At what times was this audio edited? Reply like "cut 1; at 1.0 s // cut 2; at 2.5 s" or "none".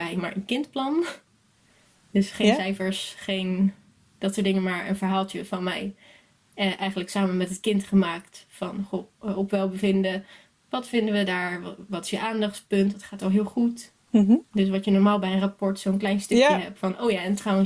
none

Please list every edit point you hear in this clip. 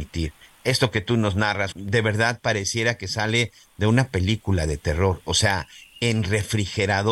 cut 1; at 1.7 s

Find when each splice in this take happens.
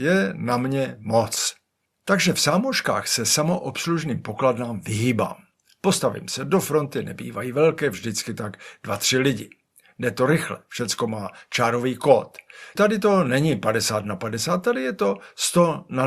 cut 1; at 12.8 s

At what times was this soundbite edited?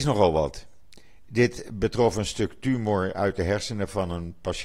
cut 1; at 1.2 s

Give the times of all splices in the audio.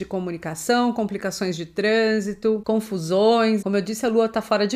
cut 1; at 3.6 s

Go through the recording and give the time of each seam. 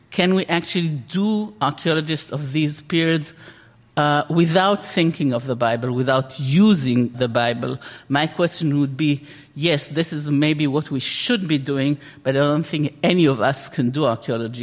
cut 1; at 7.1 s

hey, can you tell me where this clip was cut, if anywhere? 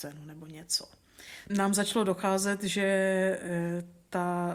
cut 1; at 1.5 s

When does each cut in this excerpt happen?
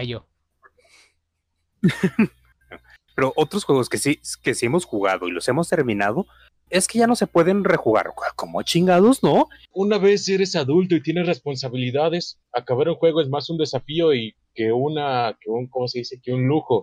cut 1; at 6.7 s // cut 2; at 9.7 s

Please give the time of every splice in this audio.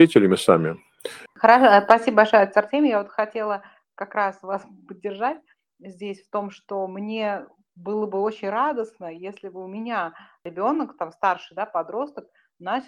cut 1; at 1.3 s

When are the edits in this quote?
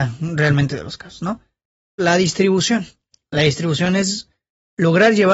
cut 1; at 2.0 s

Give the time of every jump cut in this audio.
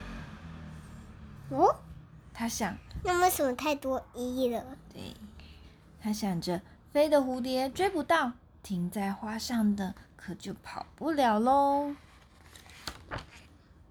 none

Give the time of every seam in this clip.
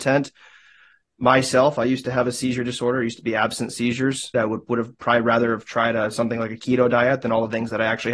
cut 1; at 4.3 s

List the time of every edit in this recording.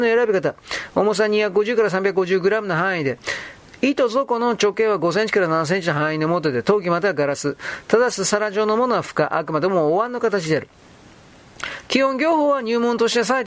none

